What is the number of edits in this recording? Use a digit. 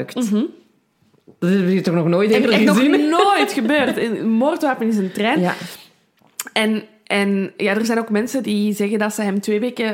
0